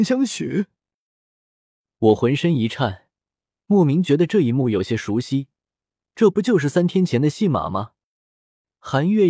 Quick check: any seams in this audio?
no; 0 cuts

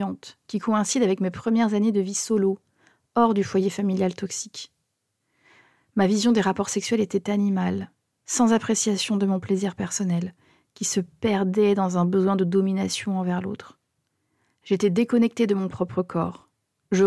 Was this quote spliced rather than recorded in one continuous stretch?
no; 0 cuts

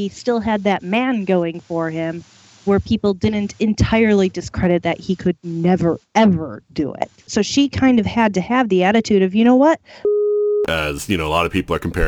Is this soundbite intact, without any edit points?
no; 2 cuts; at 7.3 s, 10.7 s

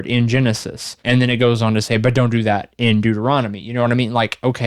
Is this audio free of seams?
no; 1 cut; at 1.0 s

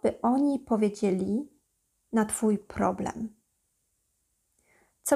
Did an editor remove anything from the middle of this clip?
no; 0 cuts

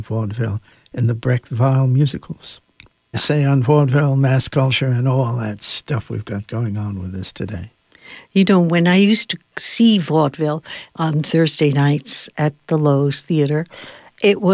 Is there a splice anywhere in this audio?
yes; 1 cut; at 3.1 s

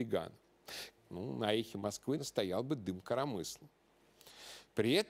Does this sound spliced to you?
yes; 2 cuts; at 1.0 s, 2.2 s

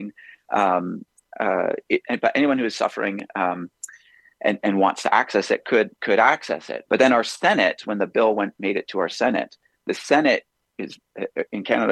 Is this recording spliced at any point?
yes; 2 cuts; at 2.0 s, 6.9 s

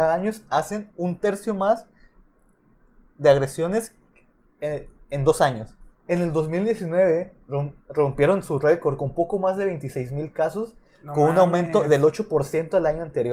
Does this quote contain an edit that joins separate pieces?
yes; 1 cut; at 5.9 s

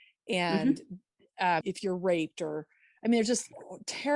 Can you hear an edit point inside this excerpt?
yes; 1 cut; at 1.6 s

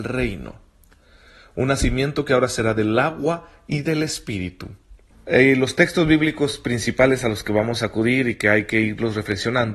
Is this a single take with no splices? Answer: no; 1 cut; at 5.1 s

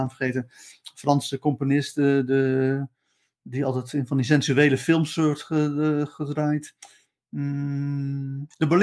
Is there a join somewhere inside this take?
no; 0 cuts

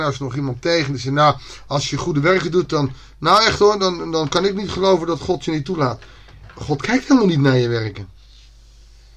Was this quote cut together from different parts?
no; 0 cuts

